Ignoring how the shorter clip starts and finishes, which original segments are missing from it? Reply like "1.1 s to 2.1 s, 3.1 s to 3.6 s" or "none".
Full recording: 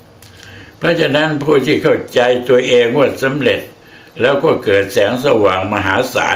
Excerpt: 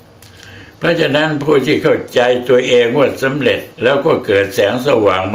3.7 s to 4.1 s